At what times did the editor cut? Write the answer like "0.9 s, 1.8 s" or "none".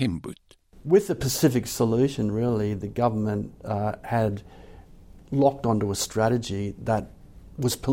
none